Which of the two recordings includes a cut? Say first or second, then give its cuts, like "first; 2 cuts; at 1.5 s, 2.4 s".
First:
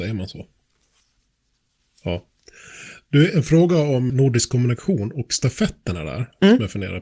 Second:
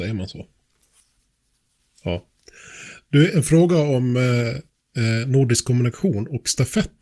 first; 1 cut; at 4.1 s